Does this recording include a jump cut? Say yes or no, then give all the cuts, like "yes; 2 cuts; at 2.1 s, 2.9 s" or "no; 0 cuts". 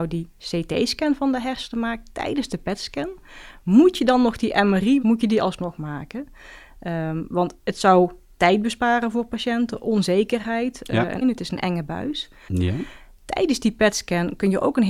yes; 3 cuts; at 5.0 s, 11.2 s, 12.5 s